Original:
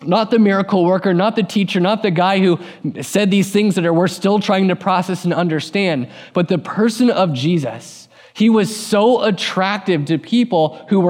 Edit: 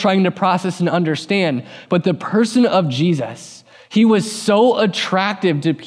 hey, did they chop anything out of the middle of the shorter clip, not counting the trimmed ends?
no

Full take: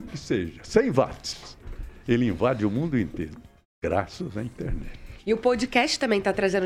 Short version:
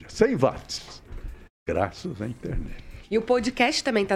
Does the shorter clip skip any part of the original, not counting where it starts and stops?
yes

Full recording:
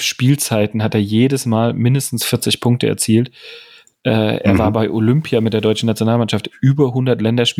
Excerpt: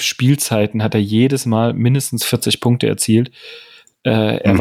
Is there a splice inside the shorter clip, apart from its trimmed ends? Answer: no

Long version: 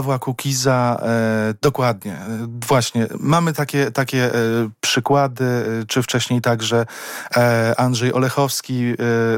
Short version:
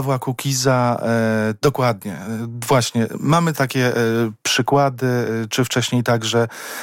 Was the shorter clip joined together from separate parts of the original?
yes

